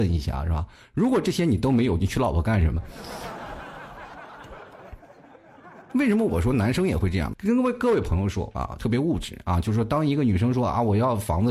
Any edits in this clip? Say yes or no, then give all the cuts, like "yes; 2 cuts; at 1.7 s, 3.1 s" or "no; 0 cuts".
yes; 2 cuts; at 7.3 s, 8.8 s